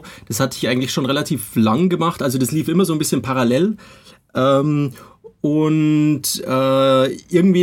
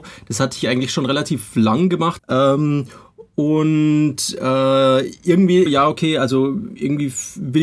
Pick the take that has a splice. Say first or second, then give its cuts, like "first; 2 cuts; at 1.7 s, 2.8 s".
second; 2 cuts; at 2.2 s, 5.7 s